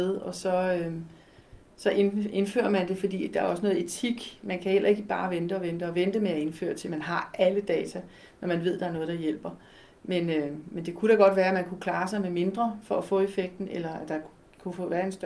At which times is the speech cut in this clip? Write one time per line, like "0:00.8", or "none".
none